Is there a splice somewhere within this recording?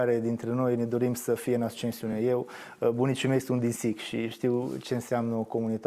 no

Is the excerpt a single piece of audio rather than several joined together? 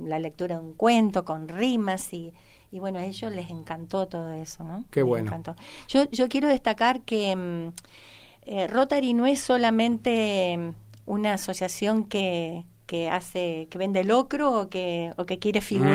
yes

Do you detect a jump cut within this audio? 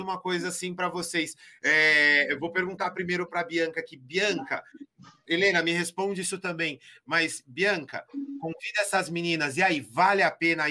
no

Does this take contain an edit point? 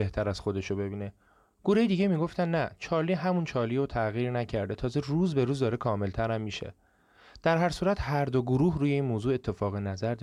no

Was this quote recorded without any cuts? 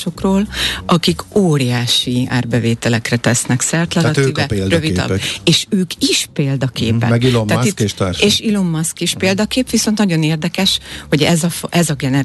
yes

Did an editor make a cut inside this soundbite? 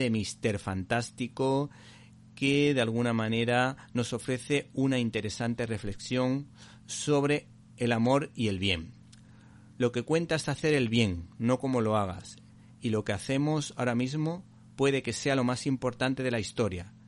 no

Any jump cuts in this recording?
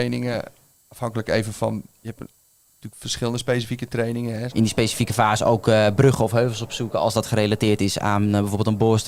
yes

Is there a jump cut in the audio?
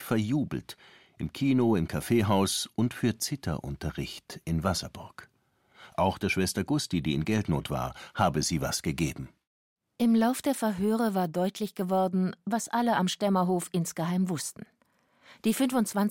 no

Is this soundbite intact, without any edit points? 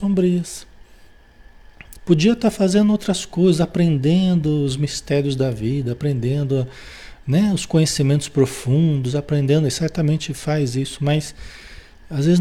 no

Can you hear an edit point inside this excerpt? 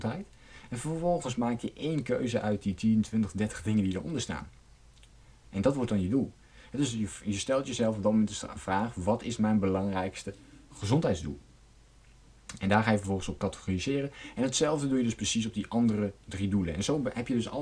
no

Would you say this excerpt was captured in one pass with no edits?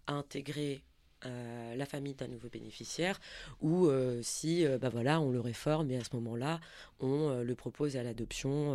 yes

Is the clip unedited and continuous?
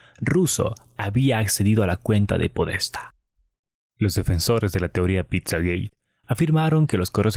yes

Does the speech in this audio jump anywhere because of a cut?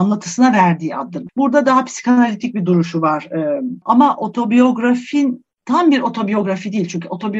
yes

